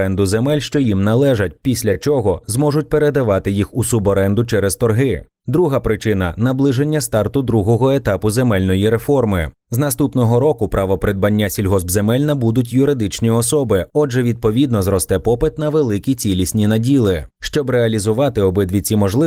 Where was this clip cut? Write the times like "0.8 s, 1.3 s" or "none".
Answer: none